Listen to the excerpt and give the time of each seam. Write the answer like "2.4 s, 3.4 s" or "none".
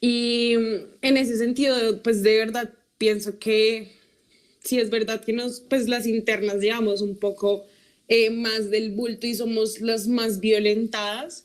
0.9 s